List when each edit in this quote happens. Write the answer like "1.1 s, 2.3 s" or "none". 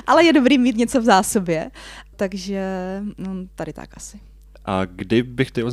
2.1 s